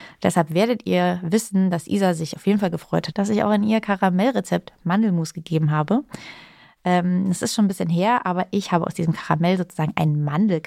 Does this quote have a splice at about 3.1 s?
yes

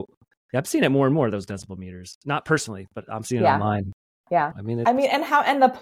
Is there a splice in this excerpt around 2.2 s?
no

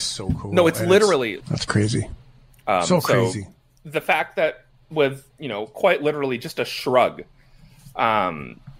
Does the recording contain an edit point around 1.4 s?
yes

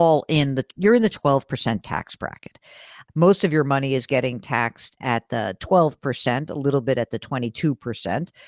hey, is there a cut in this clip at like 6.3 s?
no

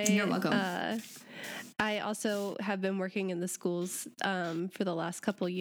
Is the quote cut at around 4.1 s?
no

